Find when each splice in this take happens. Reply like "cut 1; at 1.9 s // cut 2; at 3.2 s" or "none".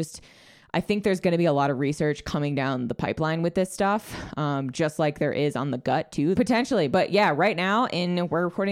cut 1; at 6.4 s